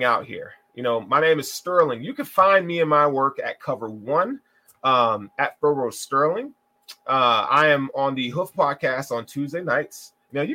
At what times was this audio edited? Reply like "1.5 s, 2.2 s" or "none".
none

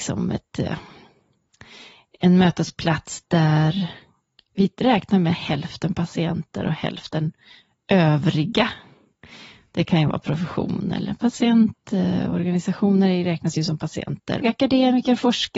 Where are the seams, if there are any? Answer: 14.4 s

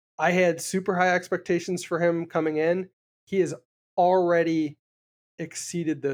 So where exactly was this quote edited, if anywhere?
none

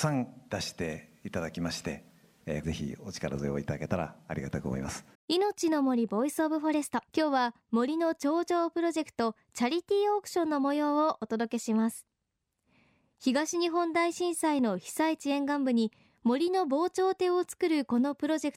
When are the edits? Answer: 2.6 s, 5.1 s, 7.1 s

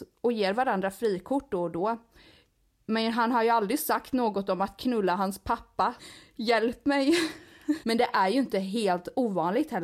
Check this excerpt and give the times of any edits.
6.0 s, 7.8 s

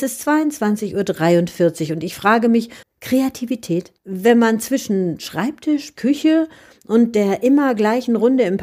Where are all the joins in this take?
2.8 s, 4.0 s, 6.0 s

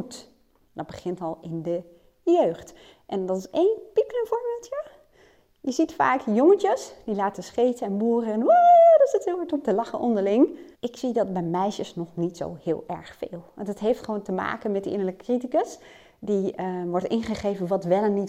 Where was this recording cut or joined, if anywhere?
10.7 s

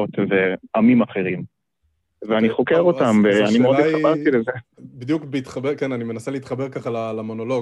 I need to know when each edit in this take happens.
4.8 s

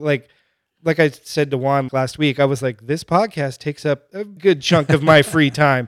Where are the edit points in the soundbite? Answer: 1.9 s, 4.4 s

